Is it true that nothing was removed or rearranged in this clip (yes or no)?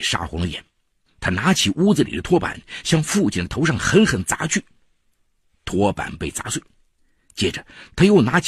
yes